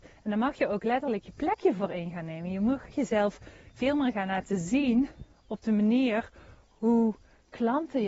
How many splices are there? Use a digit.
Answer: 1